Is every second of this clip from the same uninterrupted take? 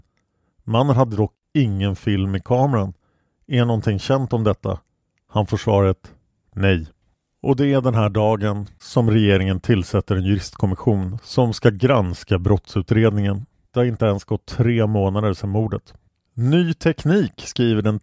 no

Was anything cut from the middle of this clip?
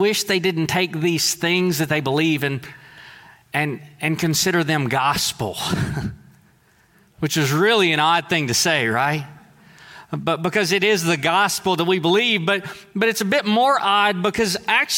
no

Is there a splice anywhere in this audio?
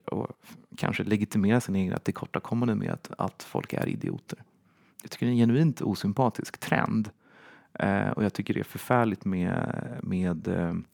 no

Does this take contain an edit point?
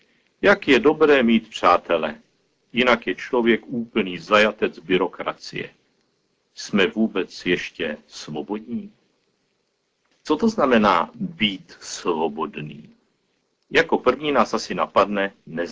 no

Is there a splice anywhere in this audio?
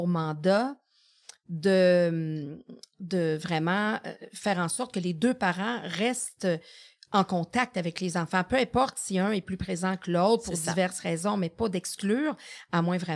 no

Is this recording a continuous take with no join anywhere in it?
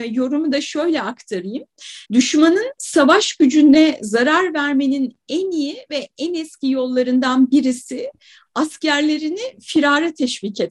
no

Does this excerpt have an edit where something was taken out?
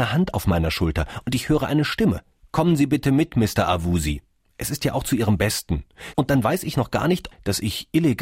yes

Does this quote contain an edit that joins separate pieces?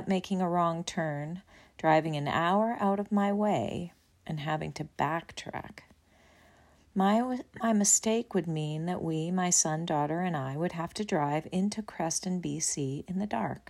no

